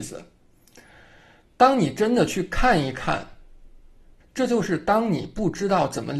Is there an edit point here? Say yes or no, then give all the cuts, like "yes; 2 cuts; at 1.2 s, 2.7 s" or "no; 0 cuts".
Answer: yes; 1 cut; at 4.2 s